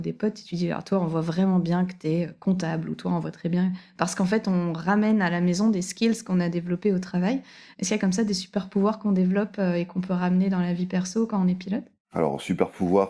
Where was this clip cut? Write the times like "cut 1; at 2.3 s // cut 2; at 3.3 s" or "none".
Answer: none